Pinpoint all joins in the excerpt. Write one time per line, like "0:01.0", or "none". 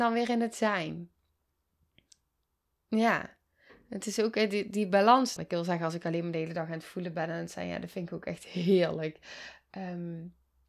0:05.4

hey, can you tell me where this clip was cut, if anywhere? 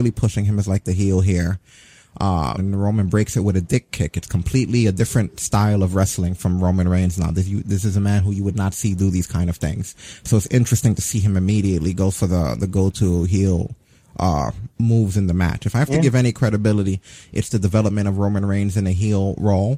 0:02.6

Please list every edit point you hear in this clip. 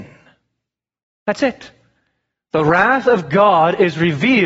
none

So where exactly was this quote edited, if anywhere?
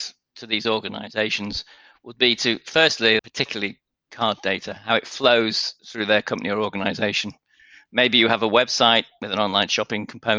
0:03.2

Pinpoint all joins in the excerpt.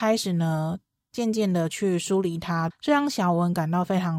0:02.7

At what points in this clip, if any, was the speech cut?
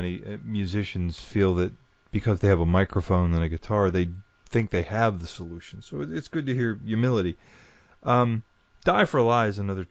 none

